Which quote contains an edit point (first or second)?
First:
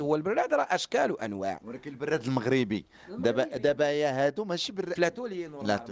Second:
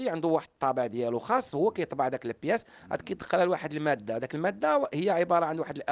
first